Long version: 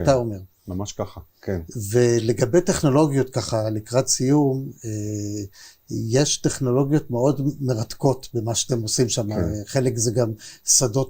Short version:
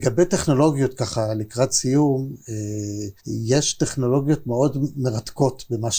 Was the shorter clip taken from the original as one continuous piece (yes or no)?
no